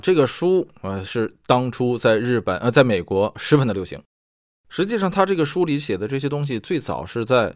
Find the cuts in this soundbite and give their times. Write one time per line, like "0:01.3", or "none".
none